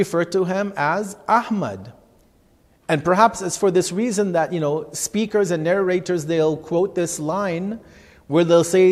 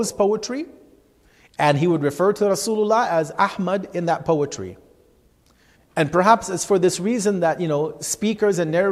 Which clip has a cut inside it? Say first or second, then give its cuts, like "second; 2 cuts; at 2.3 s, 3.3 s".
second; 1 cut; at 5.8 s